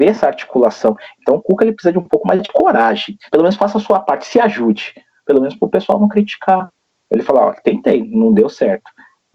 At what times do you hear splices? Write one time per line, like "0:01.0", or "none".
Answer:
0:03.3